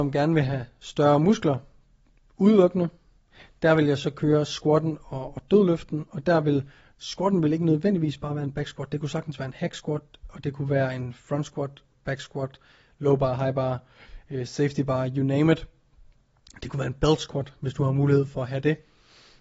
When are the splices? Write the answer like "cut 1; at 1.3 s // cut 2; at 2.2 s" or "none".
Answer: none